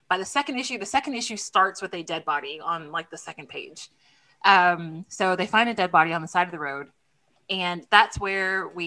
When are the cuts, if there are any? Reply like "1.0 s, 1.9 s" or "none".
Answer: none